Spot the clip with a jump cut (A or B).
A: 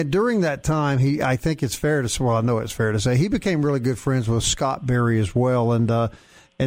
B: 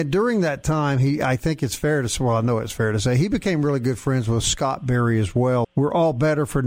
B